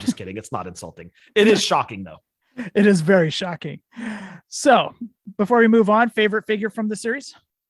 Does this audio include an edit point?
no; 0 cuts

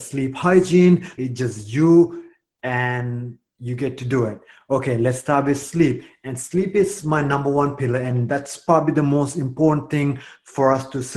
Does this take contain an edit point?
yes; 1 cut; at 1.2 s

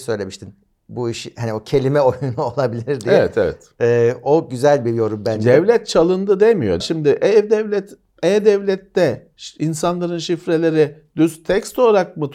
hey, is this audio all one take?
no; 1 cut; at 6.8 s

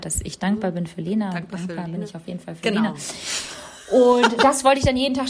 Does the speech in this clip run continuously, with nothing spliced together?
yes; 0 cuts

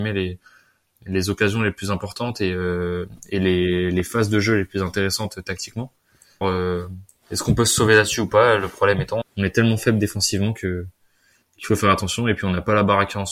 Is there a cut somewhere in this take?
yes; 2 cuts; at 6.4 s, 9.2 s

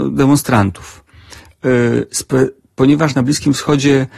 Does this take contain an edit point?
no; 0 cuts

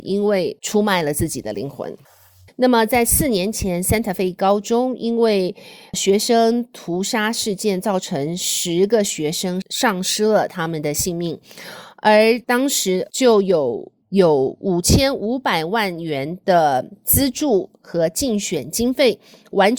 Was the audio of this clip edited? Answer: yes; 2 cuts; at 2.5 s, 14.0 s

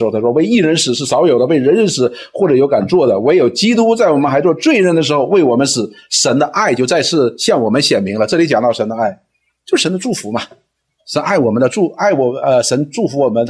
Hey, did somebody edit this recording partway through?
no; 0 cuts

